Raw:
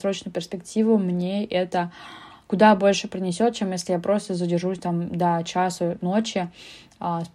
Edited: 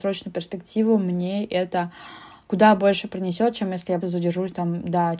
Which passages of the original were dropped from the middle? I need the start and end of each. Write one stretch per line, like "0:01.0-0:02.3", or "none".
0:04.0-0:04.3

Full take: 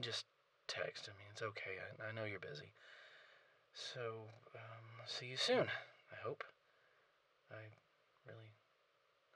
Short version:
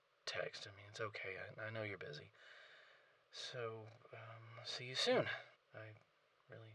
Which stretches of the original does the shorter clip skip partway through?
0:06.0-0:07.3

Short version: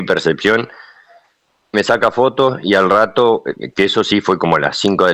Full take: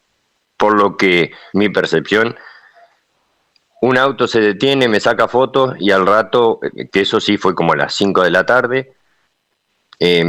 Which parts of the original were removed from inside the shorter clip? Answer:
0:03.4-0:04.9

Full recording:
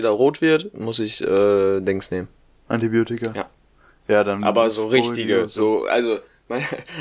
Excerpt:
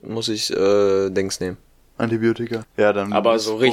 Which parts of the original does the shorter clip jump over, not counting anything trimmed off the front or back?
0:03.3-0:03.9

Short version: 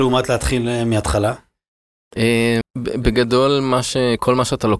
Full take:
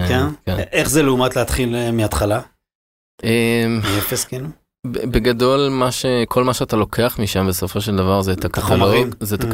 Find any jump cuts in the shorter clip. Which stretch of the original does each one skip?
0:03.7-0:04.7

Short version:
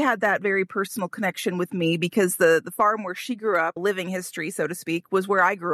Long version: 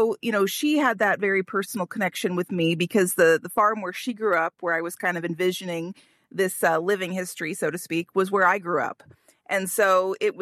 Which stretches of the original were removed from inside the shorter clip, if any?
0:04.5-0:06.8

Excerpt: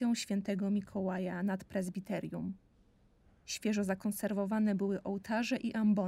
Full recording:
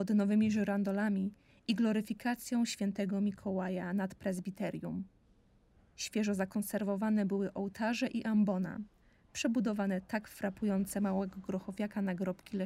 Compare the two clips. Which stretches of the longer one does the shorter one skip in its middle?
none

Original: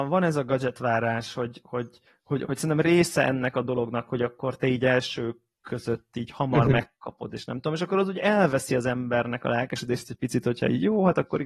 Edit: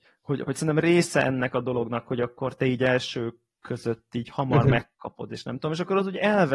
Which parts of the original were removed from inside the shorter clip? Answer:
none

